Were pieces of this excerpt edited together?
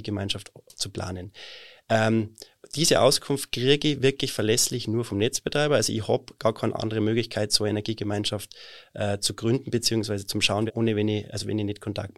yes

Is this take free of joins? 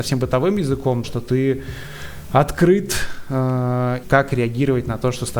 no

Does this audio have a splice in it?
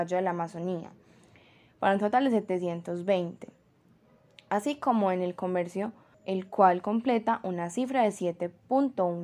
yes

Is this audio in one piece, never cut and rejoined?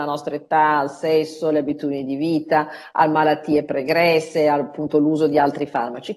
yes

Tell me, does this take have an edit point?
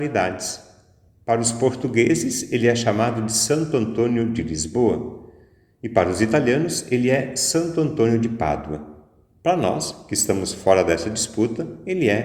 no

